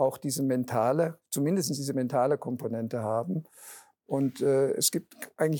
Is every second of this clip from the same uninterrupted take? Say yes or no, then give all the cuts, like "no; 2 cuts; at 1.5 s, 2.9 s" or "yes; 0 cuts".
yes; 0 cuts